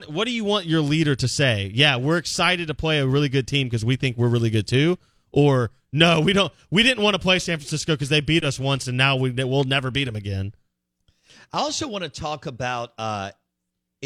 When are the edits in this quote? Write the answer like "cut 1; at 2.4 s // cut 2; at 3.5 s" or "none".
none